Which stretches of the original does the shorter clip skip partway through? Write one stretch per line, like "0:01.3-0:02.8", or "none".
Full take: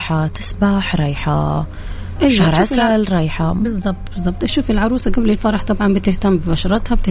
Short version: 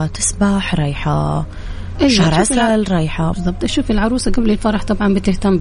0:03.5-0:04.1